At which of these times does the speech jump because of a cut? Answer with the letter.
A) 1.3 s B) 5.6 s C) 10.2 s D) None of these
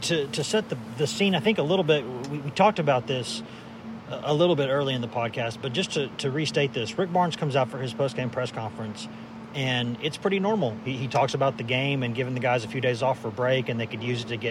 B